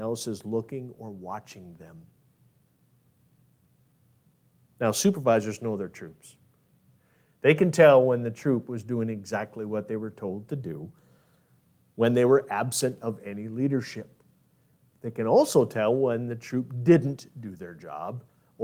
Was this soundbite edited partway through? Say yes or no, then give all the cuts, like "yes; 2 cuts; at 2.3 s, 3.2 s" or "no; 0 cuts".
no; 0 cuts